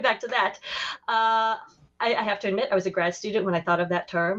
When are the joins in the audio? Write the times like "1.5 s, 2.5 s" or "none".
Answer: none